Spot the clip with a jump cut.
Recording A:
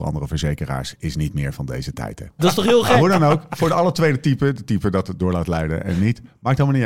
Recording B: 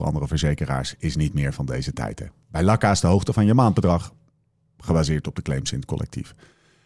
A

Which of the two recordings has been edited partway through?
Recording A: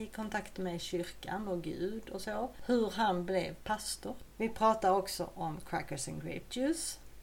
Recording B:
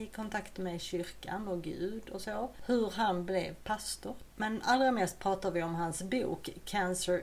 B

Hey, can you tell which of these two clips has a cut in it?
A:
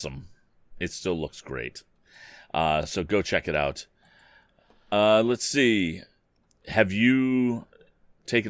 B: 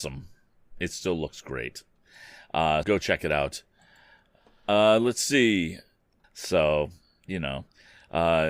B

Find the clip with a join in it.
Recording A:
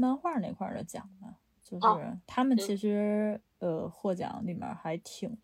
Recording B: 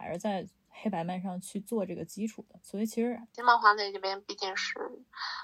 B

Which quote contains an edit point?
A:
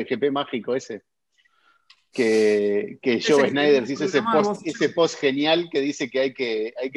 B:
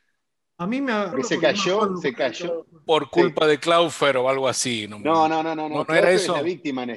B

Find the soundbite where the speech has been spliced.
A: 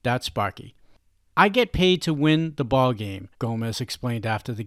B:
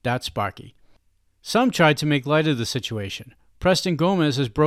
A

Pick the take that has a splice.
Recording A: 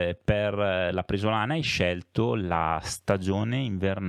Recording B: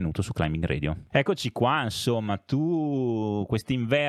B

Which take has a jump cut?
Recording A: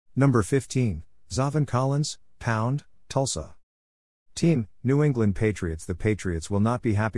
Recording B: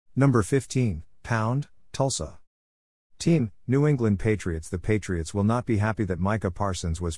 B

